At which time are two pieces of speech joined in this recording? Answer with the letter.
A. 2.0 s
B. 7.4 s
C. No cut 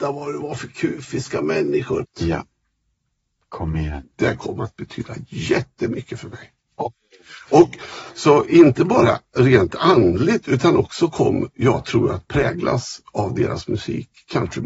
A